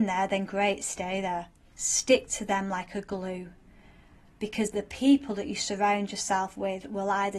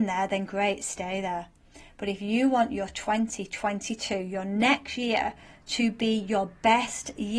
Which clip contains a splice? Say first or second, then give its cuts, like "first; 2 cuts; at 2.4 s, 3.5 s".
first; 1 cut; at 1.7 s